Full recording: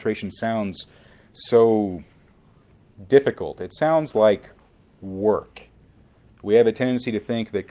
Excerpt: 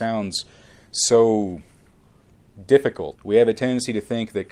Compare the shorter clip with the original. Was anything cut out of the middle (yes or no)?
yes